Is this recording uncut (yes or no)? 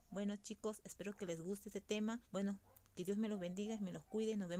no